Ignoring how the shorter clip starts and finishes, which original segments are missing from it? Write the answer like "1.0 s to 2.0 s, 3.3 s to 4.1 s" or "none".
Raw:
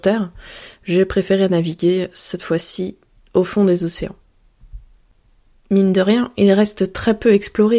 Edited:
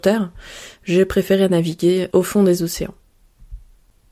2.1 s to 3.3 s